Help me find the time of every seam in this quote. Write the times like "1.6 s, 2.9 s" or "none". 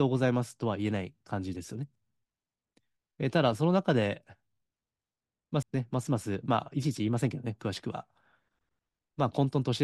5.6 s